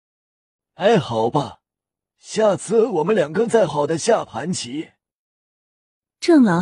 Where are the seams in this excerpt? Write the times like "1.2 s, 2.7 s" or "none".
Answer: 3.7 s